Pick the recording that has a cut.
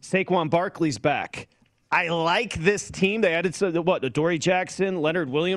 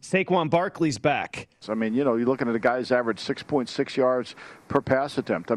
second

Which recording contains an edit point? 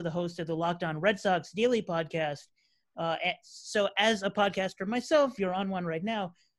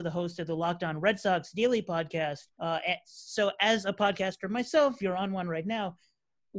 second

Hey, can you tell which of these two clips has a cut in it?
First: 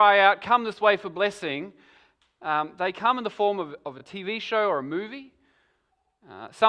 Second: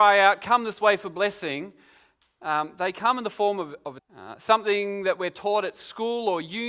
second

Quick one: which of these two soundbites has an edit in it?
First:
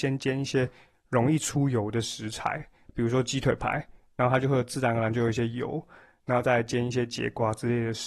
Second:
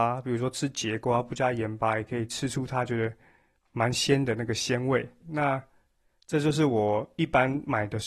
second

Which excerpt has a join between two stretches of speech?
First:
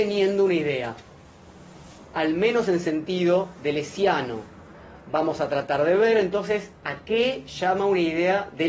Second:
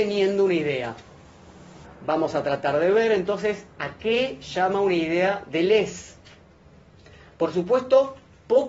second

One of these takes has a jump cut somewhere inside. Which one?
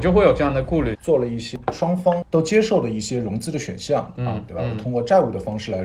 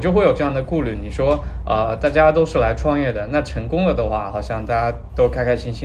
first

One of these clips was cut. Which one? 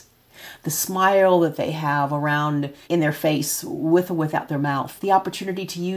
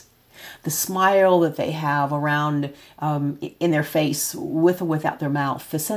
first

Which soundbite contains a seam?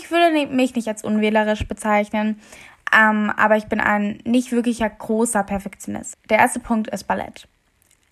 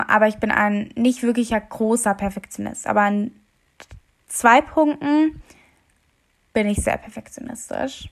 first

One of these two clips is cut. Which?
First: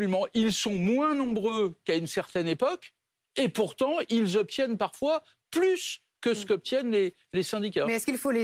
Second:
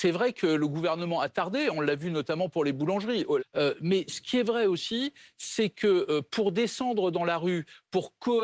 second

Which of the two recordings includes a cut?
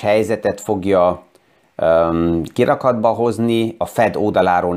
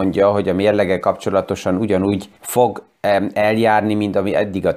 second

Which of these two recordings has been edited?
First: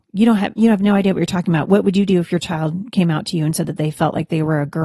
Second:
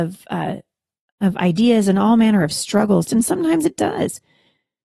second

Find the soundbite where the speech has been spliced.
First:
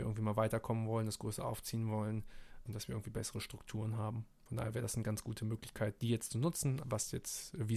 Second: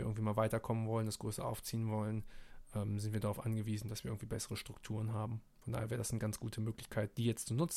first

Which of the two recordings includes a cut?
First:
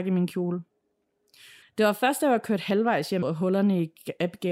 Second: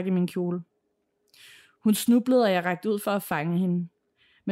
first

